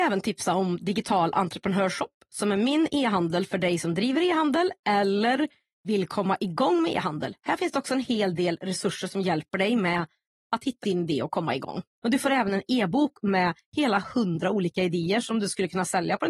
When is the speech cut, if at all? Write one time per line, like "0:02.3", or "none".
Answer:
0:10.8
0:11.9

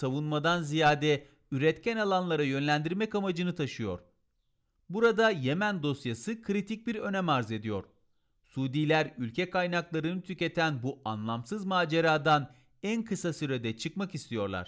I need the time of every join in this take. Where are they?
none

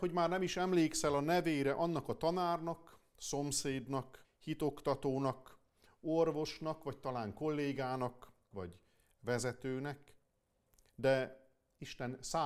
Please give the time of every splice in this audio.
0:04.2
0:08.5

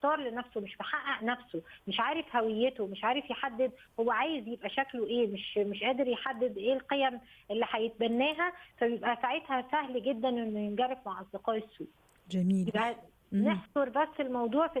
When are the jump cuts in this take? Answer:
none

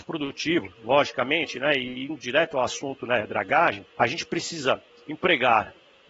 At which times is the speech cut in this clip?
0:03.9

